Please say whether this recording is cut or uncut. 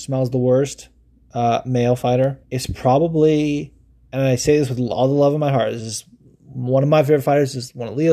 cut